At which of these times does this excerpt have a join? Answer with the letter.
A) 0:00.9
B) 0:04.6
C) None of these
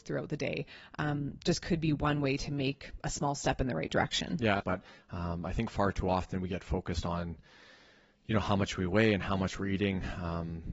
B